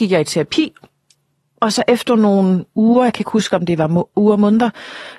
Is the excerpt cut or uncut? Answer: uncut